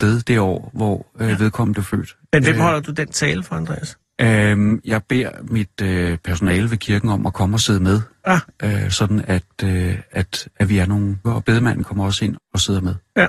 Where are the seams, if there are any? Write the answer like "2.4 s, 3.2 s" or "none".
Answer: 11.2 s, 12.4 s